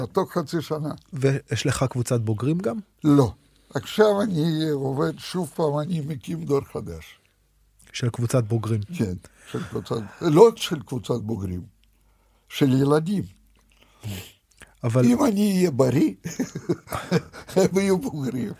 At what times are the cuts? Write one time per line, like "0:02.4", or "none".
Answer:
0:13.6